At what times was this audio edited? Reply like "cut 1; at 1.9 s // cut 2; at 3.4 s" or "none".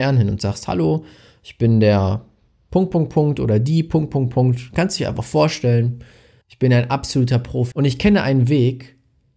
cut 1; at 6.4 s // cut 2; at 7.7 s